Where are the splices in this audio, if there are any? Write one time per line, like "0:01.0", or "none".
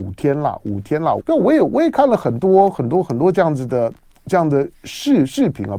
0:01.2